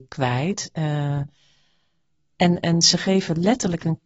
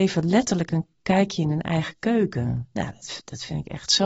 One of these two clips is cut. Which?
first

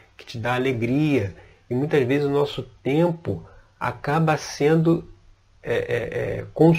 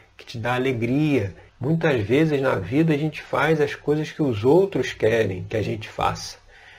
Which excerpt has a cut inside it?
second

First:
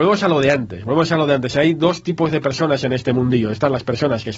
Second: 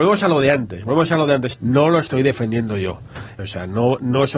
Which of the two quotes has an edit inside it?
second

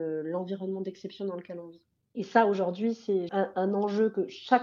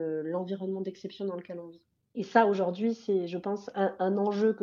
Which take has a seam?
first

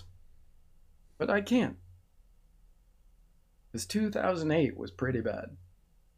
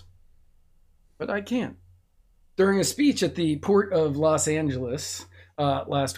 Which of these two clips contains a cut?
second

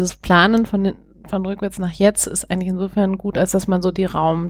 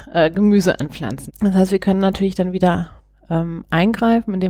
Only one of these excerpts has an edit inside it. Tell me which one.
second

